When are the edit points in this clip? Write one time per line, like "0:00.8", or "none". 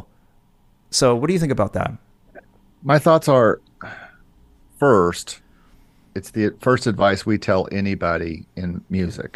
none